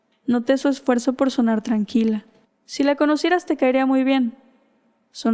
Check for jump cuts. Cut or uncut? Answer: cut